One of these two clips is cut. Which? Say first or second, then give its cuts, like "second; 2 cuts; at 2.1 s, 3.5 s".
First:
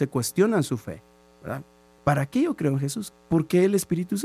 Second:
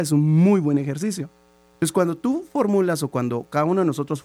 first; 2 cuts; at 2.0 s, 3.1 s